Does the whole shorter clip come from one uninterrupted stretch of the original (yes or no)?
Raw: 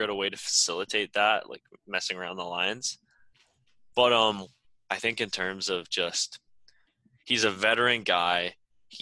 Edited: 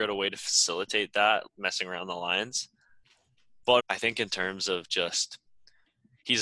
no